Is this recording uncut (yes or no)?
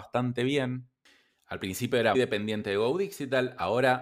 no